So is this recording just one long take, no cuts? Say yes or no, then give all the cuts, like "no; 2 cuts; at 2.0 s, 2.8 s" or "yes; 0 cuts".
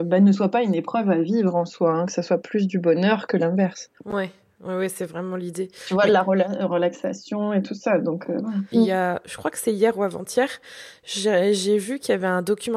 no; 1 cut; at 8.7 s